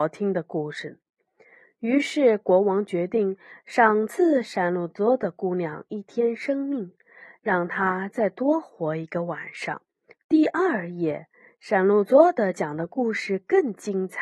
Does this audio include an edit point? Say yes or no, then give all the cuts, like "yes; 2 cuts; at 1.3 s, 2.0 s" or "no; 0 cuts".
yes; 1 cut; at 10.1 s